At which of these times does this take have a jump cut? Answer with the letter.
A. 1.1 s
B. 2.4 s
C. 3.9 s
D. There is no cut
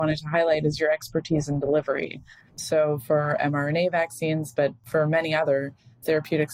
D